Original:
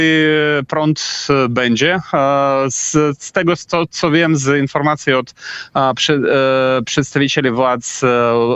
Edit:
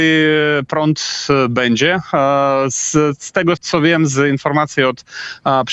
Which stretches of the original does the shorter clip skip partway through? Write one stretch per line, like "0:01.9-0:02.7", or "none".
0:03.6-0:03.9